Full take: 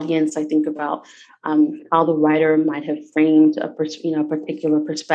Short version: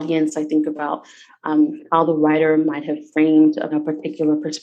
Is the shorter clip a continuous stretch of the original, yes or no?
no